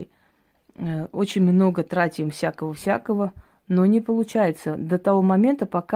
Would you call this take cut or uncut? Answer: uncut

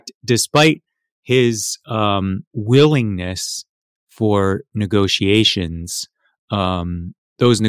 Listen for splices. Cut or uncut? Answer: cut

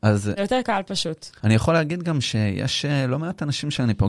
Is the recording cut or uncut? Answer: cut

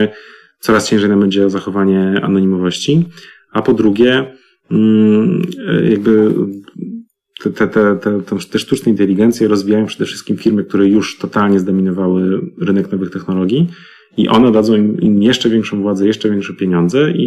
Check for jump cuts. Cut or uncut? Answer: uncut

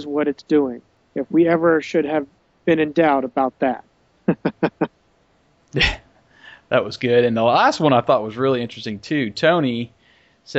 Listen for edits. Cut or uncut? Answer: uncut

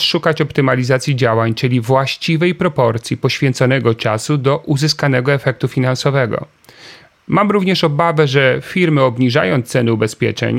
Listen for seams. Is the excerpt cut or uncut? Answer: uncut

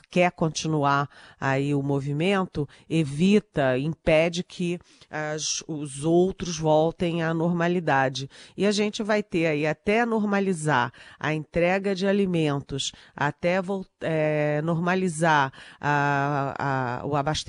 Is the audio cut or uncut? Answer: uncut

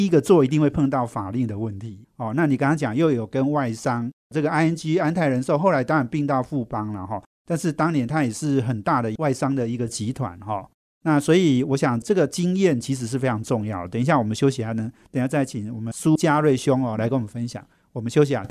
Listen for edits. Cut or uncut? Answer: uncut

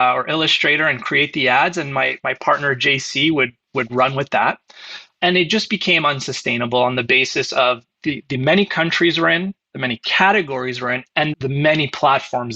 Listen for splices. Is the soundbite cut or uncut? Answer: cut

